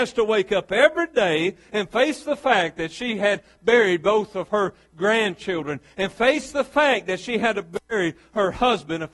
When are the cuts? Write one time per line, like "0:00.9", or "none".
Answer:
none